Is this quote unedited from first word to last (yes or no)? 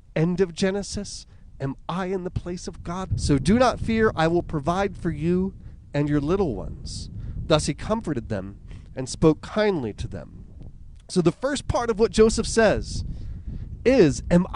no